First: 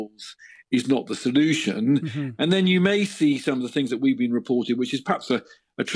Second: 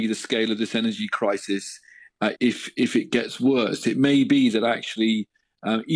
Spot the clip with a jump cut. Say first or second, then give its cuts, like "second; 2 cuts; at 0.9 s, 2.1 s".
second; 1 cut; at 2.3 s